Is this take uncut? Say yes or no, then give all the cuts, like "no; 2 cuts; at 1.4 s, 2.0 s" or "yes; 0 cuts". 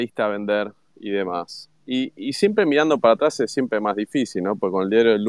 yes; 0 cuts